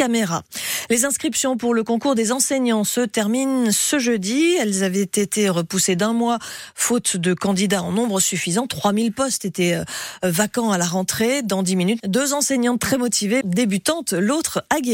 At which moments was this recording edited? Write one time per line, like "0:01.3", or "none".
0:12.0
0:13.4